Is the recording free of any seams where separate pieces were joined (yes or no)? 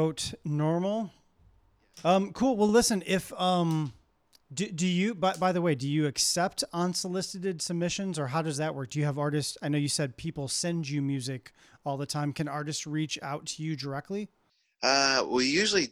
yes